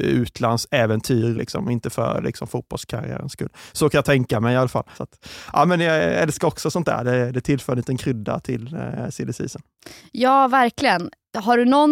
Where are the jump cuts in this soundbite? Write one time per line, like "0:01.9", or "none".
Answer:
0:01.3
0:04.9